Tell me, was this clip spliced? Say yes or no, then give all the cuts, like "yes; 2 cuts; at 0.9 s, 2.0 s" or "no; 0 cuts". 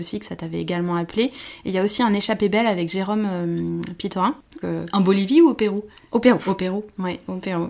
yes; 1 cut; at 4.6 s